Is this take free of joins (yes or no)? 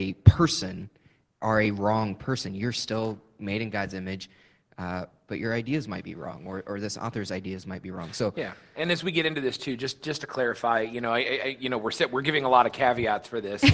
yes